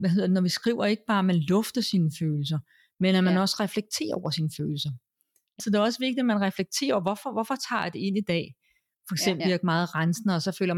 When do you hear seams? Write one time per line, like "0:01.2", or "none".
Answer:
0:05.6
0:09.4